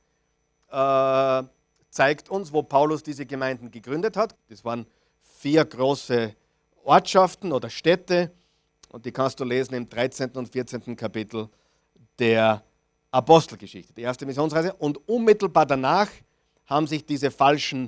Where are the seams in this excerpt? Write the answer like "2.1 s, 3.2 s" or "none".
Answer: 4.3 s